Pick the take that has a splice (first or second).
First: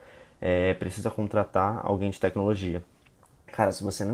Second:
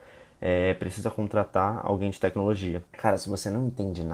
second